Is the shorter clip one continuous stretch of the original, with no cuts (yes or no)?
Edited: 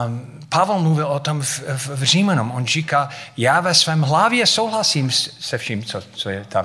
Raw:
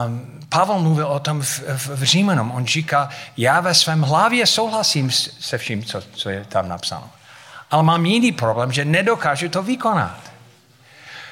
yes